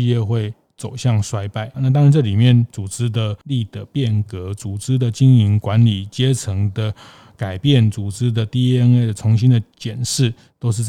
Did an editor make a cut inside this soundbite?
yes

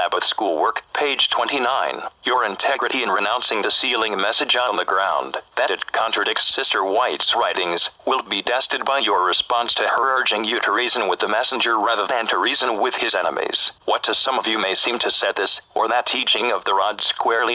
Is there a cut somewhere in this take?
yes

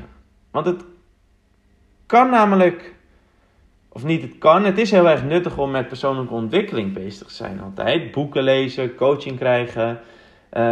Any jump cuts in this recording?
no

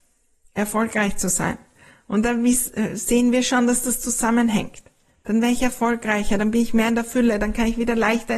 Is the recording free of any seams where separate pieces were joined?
yes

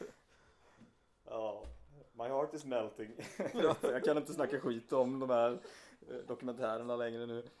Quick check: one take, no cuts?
yes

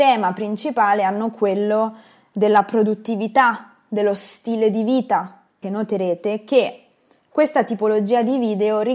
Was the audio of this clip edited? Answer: yes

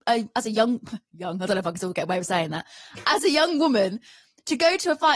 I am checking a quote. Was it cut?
no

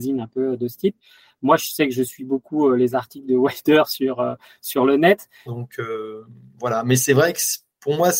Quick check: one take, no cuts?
no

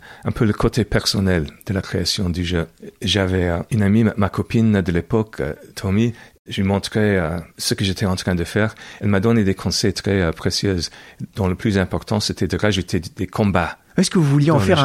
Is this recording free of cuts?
yes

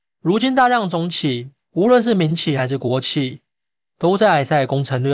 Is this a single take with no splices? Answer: yes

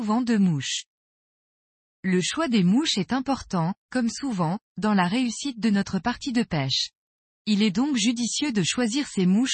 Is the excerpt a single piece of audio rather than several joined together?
no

